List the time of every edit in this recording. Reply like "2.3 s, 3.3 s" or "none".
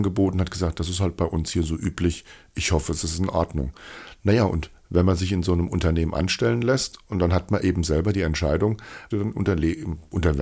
9.1 s